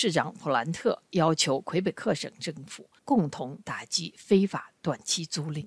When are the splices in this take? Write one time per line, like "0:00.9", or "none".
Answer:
0:03.0